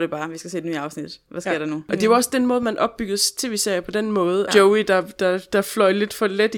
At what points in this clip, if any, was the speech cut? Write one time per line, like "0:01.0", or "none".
0:04.5